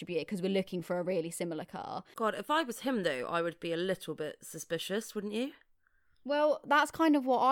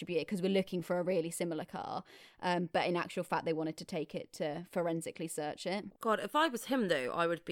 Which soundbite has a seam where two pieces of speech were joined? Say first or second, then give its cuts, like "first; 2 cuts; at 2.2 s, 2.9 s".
first; 1 cut; at 2.1 s